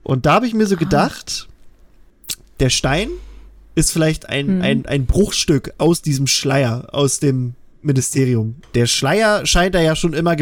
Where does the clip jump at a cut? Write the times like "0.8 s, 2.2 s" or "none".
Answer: 8.6 s